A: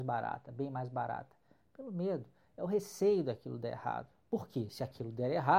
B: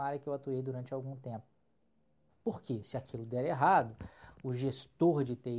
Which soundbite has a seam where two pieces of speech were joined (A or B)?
B